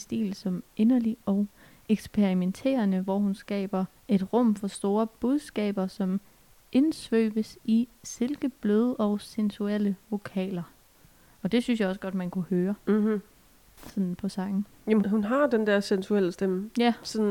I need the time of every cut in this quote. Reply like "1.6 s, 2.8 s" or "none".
4.0 s, 15.0 s